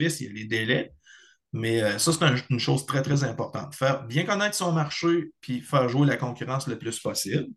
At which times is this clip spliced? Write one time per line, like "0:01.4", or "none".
none